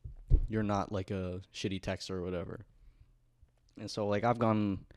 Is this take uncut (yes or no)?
yes